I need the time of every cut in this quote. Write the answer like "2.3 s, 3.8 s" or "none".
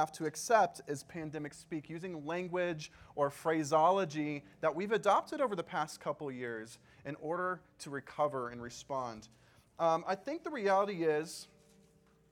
none